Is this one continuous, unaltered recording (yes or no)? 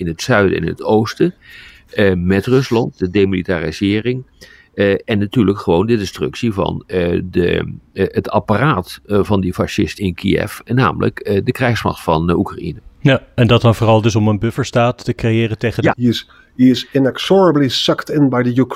no